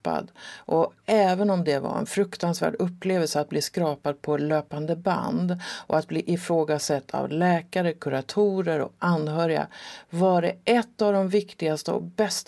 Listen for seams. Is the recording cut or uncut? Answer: uncut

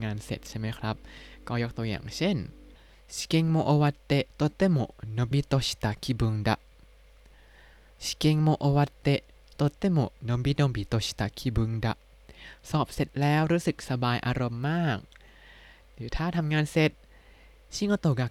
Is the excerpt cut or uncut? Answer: cut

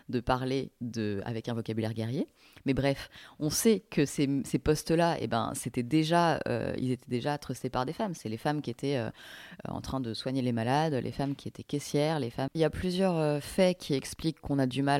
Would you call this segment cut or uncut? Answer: cut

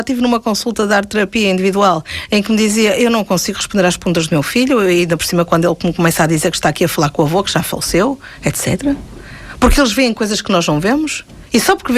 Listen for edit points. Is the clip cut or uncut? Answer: uncut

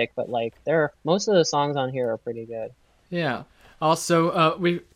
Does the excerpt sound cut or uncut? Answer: cut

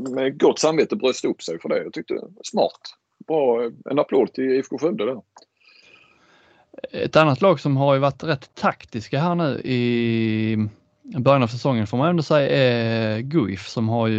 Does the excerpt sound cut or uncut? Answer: uncut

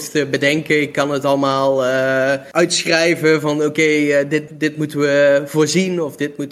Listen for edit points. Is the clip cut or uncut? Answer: cut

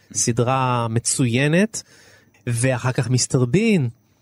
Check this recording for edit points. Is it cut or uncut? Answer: cut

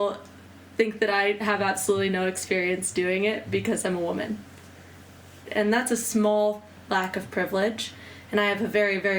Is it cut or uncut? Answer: cut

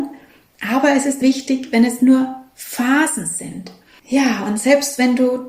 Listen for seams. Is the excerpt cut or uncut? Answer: cut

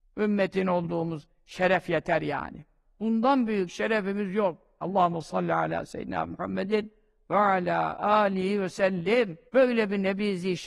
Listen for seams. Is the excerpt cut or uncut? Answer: cut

